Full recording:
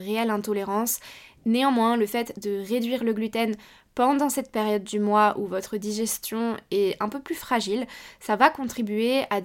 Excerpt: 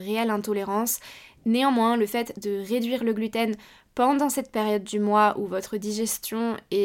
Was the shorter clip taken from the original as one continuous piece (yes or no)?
yes